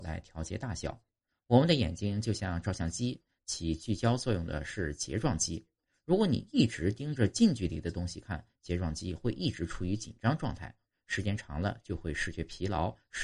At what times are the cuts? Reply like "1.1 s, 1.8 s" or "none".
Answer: 1.3 s